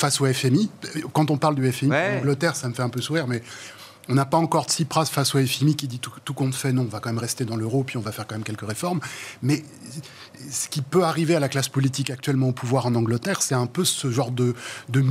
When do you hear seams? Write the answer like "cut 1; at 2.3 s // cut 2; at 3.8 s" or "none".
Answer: none